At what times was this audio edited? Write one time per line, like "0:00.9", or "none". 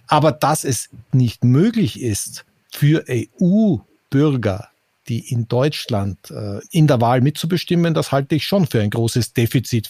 0:01.1
0:06.6